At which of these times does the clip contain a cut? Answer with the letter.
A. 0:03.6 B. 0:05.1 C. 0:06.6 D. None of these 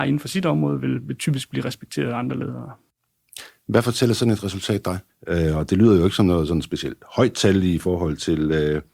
B